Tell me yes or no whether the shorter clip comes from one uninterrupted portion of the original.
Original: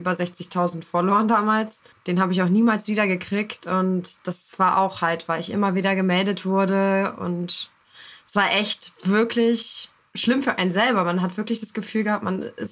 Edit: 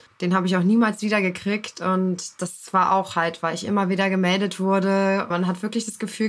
no